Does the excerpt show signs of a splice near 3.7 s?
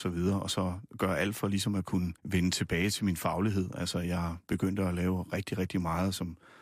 no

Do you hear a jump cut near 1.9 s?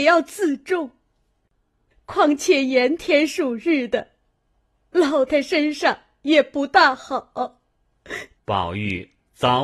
no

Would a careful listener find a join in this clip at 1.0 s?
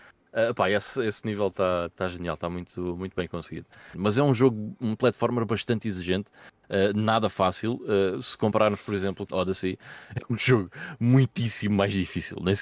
no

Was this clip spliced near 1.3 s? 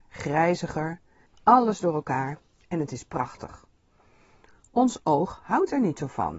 yes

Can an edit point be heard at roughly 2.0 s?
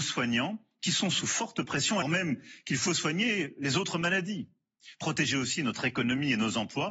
yes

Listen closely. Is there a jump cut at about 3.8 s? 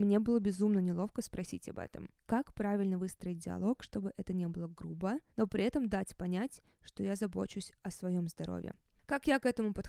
no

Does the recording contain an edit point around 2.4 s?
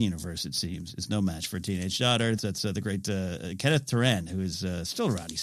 yes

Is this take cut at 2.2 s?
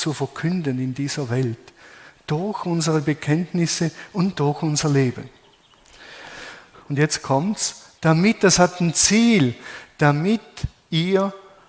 no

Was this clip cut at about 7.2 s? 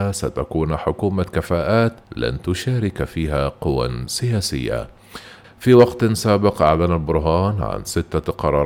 no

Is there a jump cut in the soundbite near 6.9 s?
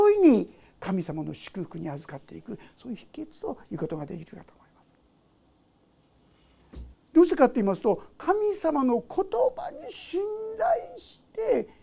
yes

